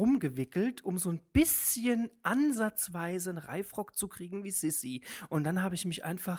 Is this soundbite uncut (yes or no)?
yes